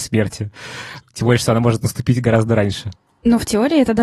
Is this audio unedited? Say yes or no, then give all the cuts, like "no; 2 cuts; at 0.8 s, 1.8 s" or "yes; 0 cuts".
yes; 0 cuts